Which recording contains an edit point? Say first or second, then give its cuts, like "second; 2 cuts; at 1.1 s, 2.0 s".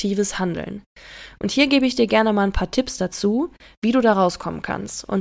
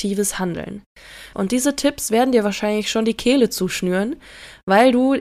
second; 1 cut; at 1.3 s